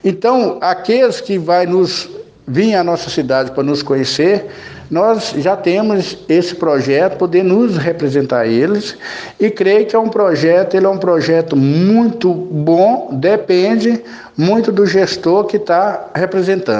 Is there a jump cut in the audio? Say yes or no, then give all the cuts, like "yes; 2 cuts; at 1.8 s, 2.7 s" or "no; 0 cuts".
no; 0 cuts